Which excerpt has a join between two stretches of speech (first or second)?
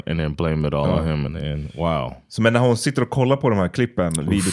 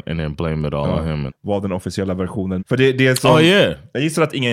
second